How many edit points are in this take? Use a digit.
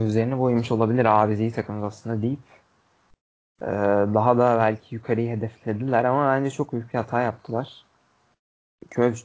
0